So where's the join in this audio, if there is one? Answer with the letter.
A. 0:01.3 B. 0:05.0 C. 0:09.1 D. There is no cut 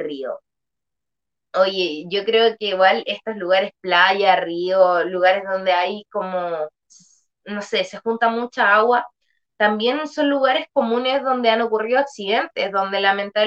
D